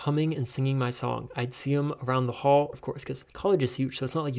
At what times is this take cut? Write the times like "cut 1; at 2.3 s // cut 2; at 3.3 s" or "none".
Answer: cut 1; at 2.7 s